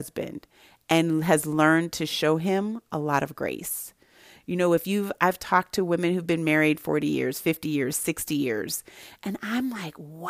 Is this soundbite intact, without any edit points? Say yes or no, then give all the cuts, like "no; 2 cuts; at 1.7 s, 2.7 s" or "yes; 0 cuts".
yes; 0 cuts